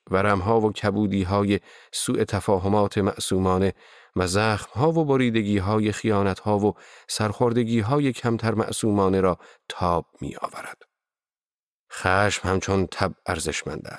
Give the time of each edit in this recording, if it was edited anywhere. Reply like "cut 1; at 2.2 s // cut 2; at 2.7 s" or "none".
none